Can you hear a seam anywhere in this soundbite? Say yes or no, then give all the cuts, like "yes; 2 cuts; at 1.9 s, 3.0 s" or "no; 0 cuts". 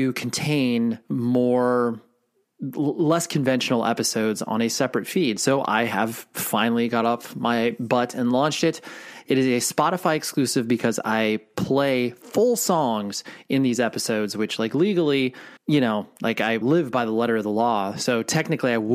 yes; 2 cuts; at 15.6 s, 16.6 s